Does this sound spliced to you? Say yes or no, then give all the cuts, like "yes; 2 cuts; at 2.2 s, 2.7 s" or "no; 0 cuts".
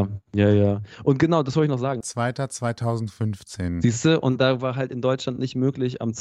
yes; 1 cut; at 2.0 s